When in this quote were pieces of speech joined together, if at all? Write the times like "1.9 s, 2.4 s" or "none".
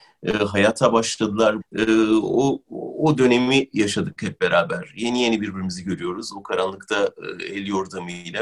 1.6 s